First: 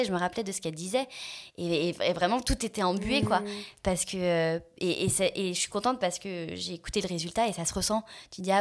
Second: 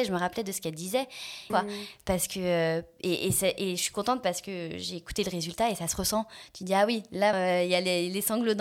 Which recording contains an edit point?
second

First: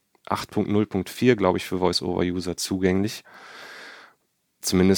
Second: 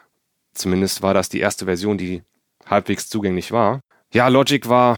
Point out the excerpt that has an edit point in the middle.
second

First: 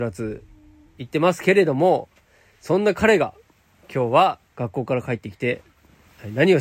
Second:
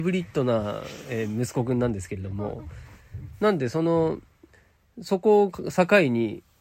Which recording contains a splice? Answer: first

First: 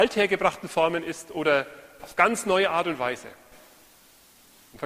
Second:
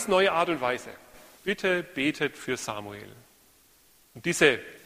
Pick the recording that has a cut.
second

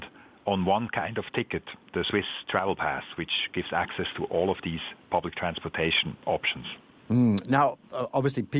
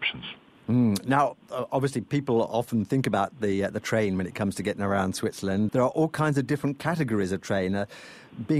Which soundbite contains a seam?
second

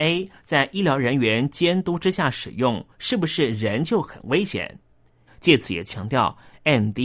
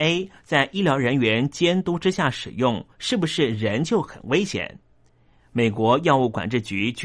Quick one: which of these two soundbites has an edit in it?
first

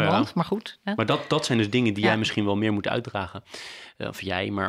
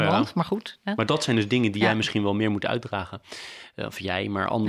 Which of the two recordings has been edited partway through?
second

